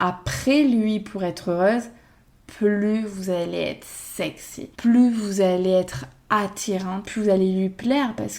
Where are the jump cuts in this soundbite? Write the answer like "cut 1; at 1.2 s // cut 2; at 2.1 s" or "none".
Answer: cut 1; at 4.7 s // cut 2; at 7.0 s